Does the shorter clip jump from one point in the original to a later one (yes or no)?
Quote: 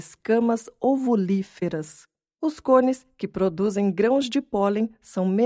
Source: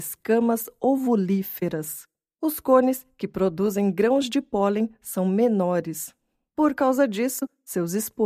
no